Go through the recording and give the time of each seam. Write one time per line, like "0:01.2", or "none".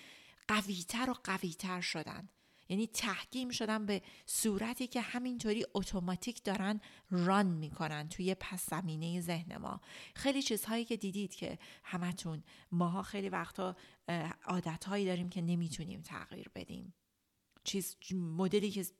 none